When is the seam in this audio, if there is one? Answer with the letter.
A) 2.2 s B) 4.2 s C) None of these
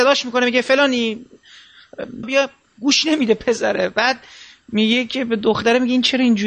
A